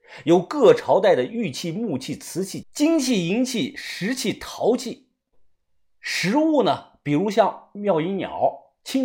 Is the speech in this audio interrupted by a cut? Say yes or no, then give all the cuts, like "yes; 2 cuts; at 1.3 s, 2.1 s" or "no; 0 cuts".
yes; 1 cut; at 2.6 s